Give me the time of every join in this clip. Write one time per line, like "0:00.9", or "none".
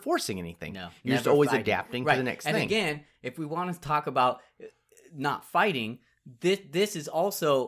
none